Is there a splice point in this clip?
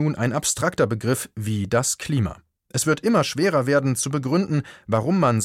yes; 1 cut; at 2.6 s

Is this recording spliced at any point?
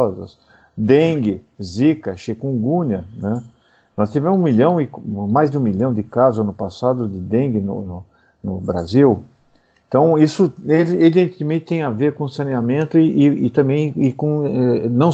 no; 0 cuts

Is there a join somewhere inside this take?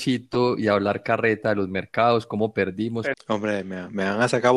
yes; 1 cut; at 3.1 s

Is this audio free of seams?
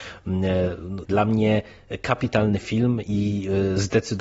no; 1 cut; at 1.0 s

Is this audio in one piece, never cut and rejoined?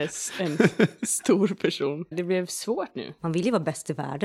no; 1 cut; at 2.1 s

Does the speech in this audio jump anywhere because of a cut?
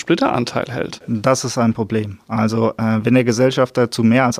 no; 0 cuts

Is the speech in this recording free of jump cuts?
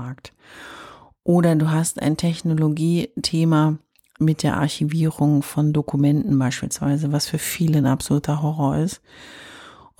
no; 1 cut; at 4.2 s

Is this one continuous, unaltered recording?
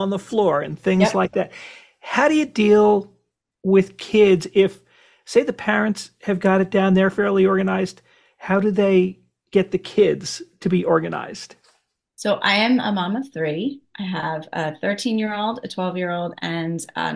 yes; 0 cuts

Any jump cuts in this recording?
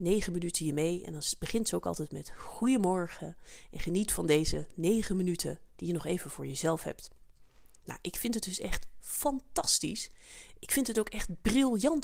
no; 0 cuts

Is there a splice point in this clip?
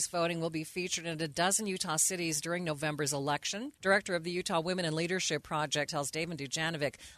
yes; 2 cuts; at 3.7 s, 5.9 s

